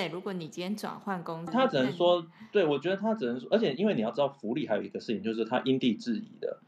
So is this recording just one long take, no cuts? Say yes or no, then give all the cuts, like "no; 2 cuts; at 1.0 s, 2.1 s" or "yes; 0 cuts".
no; 1 cut; at 1.5 s